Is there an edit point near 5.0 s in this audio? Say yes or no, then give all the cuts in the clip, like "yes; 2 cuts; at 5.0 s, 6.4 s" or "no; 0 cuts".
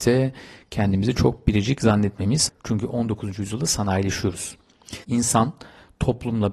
yes; 2 cuts; at 2.5 s, 5.0 s